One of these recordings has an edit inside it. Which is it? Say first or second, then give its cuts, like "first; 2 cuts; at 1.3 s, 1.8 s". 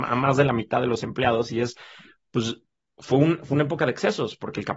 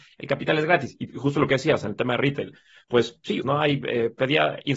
second; 1 cut; at 3.4 s